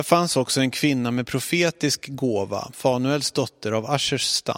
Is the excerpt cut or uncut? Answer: cut